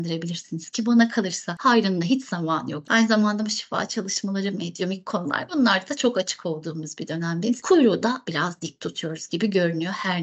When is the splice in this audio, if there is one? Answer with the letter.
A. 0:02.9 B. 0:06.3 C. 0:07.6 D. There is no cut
A